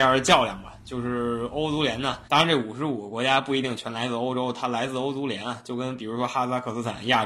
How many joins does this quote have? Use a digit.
1